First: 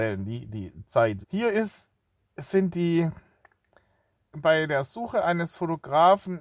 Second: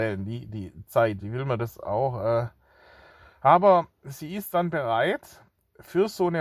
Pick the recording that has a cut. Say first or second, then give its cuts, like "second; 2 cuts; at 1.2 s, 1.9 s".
first; 2 cuts; at 1.2 s, 4.3 s